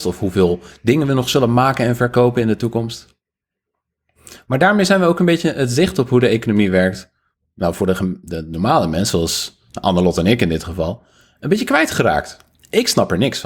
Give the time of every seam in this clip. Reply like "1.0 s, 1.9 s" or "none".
none